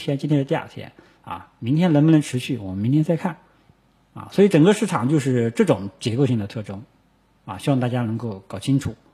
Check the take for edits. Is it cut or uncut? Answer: uncut